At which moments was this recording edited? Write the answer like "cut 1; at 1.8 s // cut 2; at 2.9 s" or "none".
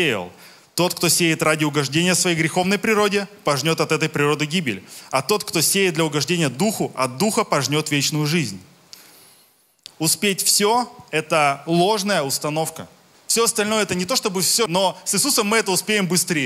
cut 1; at 13.1 s // cut 2; at 14.7 s